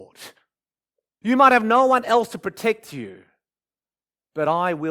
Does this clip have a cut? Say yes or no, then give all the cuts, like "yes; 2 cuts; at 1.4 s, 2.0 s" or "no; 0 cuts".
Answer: yes; 1 cut; at 1.2 s